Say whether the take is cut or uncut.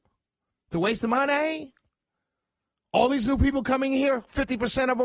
uncut